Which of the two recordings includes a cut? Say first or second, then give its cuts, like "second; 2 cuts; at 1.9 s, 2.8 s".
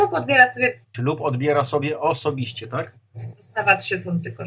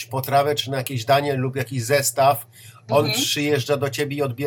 first; 2 cuts; at 0.9 s, 3.3 s